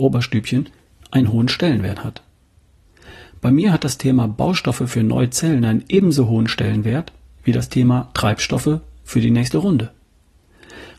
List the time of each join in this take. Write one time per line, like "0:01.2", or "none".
none